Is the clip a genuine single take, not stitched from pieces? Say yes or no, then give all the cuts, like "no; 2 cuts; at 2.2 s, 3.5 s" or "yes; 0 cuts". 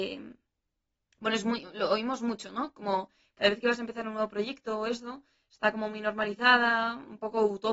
yes; 0 cuts